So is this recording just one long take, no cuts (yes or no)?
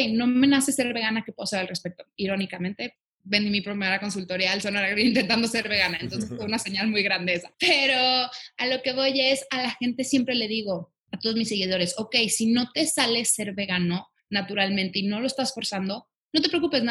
yes